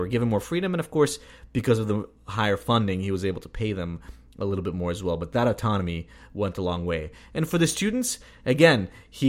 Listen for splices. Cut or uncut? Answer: uncut